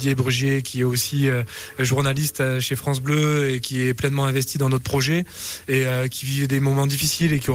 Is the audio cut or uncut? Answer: uncut